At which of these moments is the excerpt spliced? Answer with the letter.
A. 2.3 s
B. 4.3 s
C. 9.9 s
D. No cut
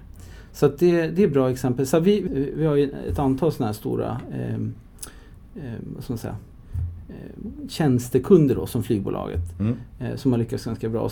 A